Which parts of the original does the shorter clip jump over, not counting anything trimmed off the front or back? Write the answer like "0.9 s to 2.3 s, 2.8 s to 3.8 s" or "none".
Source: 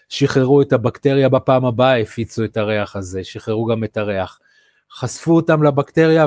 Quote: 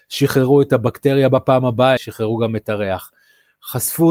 2.0 s to 3.2 s